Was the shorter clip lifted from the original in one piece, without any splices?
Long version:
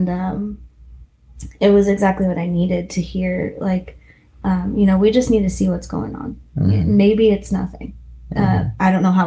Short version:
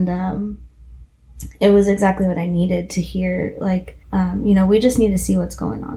no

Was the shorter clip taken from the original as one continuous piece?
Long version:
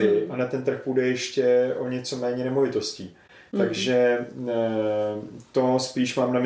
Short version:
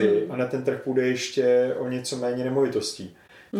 yes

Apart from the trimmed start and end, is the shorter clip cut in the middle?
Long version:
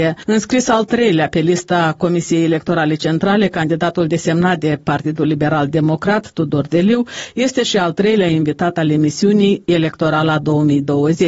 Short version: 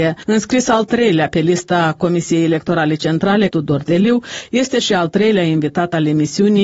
yes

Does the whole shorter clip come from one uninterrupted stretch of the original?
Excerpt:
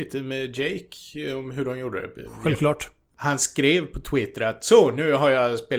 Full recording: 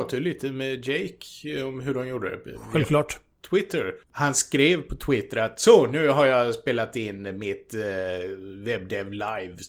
no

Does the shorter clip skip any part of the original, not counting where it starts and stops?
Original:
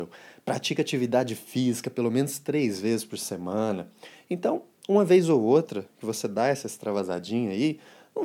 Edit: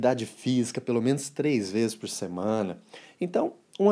no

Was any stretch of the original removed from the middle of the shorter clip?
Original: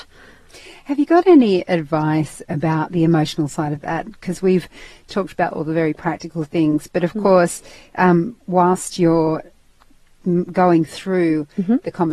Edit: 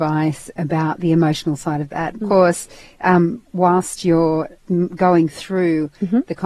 yes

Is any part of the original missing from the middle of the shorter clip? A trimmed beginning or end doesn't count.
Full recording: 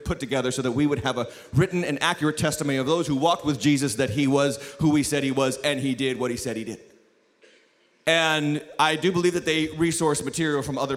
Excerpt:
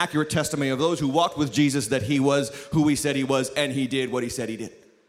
no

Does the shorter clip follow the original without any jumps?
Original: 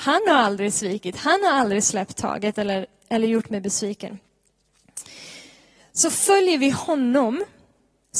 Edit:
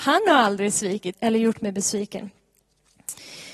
no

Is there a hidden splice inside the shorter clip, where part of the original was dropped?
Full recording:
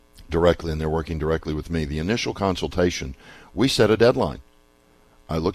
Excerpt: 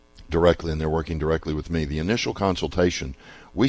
no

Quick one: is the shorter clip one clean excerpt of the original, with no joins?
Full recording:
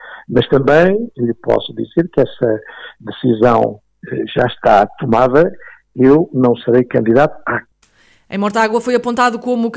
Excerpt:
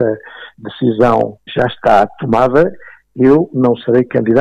no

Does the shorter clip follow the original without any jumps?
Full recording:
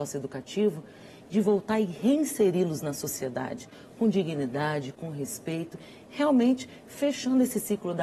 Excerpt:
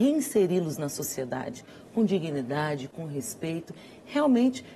yes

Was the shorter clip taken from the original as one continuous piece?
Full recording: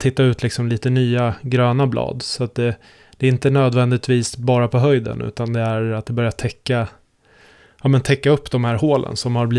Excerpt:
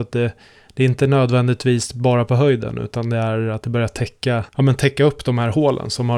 no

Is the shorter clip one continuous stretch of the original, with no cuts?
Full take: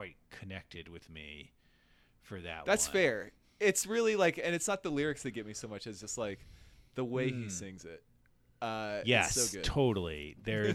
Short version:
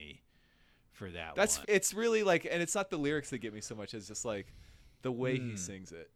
no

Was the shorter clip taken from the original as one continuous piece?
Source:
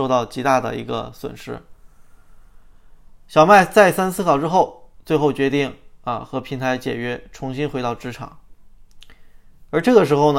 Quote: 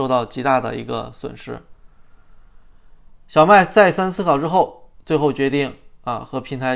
yes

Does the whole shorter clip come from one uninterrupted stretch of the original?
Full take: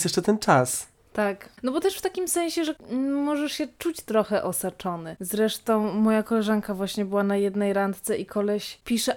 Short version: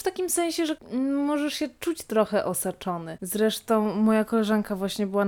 yes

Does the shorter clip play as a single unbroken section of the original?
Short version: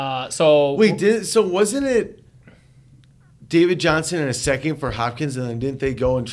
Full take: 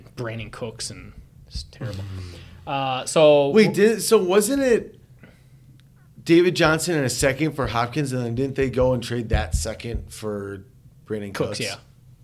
yes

